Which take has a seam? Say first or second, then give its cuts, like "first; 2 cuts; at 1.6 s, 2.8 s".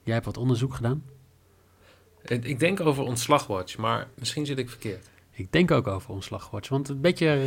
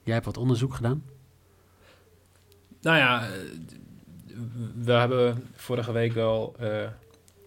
first; 2 cuts; at 2.1 s, 4.1 s